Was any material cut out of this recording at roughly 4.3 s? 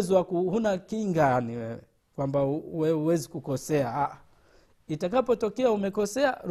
no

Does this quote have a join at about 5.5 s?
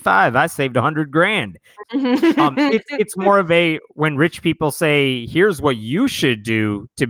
no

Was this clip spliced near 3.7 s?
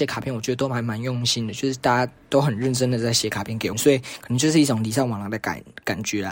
yes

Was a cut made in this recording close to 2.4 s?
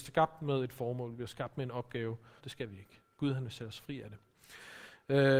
yes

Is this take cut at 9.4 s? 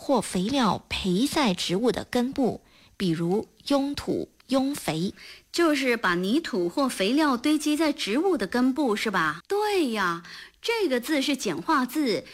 yes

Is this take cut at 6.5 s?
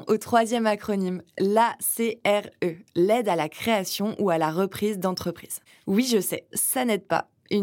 yes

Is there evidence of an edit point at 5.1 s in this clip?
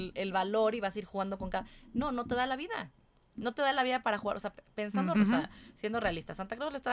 yes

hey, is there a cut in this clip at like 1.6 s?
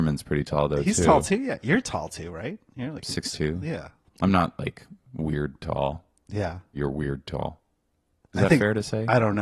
no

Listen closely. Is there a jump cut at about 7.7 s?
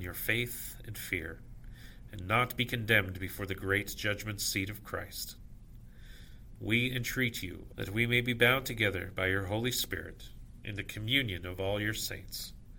yes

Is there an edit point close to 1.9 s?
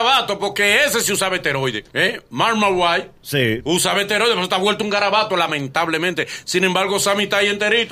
yes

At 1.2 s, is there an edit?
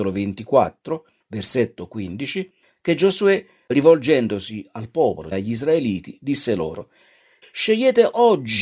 no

